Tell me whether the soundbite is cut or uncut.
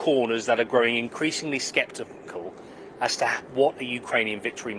uncut